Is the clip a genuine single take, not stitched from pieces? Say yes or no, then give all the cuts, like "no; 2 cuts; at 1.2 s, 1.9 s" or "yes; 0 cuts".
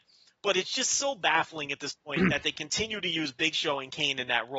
yes; 0 cuts